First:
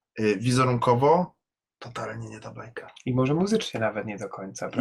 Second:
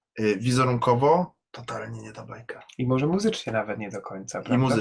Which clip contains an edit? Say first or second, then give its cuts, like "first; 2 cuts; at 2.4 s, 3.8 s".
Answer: second; 1 cut; at 1.4 s